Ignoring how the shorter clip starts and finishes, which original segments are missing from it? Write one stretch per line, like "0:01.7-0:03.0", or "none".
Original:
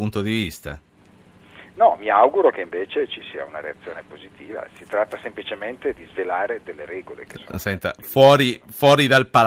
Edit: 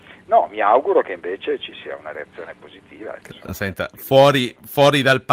0:04.7-0:07.3